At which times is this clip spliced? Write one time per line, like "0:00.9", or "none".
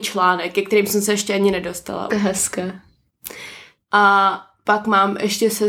0:02.1
0:03.8